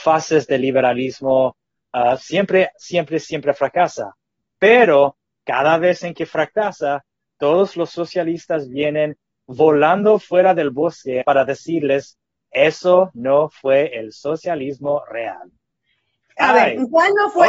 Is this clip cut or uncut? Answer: cut